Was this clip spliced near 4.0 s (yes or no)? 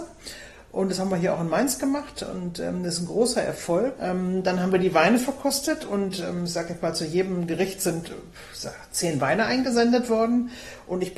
yes